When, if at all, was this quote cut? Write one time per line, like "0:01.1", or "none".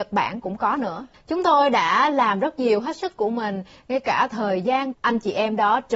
0:01.1
0:04.9